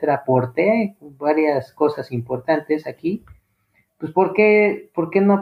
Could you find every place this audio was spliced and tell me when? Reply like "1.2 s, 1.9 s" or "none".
none